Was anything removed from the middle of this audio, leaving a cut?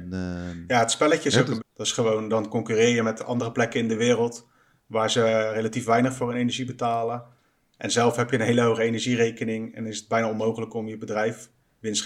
yes; 1 cut; at 1.6 s

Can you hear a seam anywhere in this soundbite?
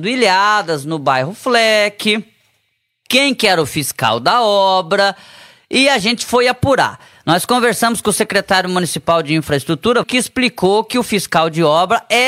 yes; 1 cut; at 10.0 s

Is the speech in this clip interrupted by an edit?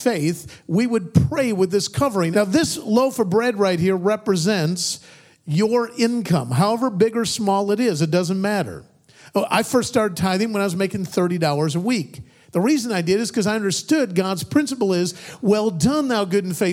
yes; 1 cut; at 2.3 s

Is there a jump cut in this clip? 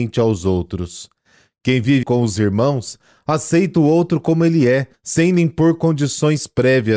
yes; 2 cuts; at 2.0 s, 4.9 s

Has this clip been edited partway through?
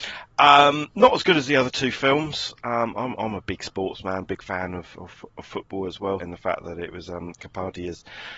yes; 1 cut; at 6.2 s

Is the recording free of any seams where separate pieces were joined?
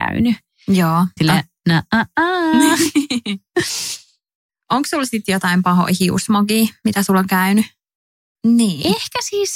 no; 2 cuts; at 1.2 s, 8.3 s

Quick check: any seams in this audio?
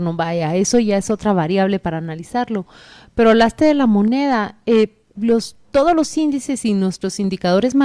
no; 0 cuts

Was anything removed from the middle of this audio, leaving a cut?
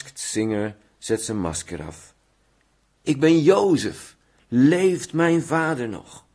no; 0 cuts

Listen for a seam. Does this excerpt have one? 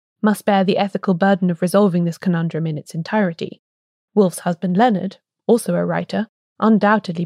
no; 0 cuts

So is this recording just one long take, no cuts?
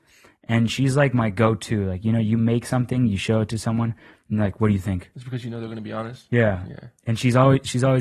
yes; 0 cuts

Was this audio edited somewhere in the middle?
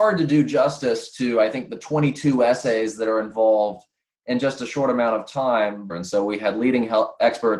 yes; 1 cut; at 5.9 s

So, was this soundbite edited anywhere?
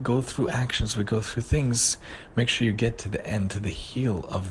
no; 0 cuts

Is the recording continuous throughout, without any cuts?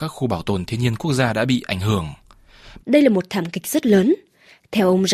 no; 1 cut; at 2.8 s

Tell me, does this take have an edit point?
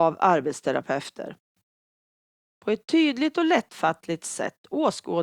no; 0 cuts

